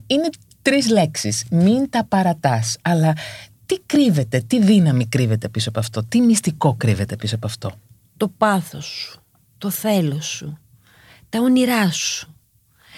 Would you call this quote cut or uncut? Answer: uncut